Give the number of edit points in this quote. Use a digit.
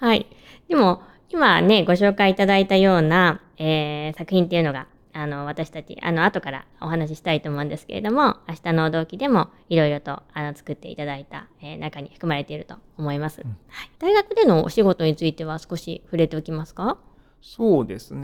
1